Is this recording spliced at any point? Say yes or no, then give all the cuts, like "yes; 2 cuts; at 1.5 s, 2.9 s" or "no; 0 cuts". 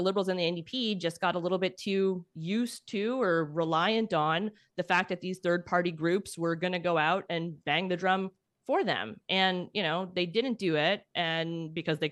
no; 0 cuts